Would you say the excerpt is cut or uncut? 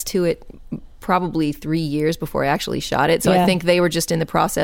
uncut